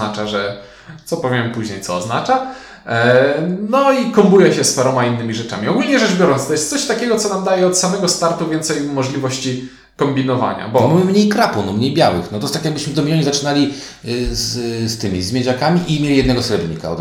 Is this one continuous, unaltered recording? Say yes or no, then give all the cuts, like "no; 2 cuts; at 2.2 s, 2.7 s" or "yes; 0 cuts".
yes; 0 cuts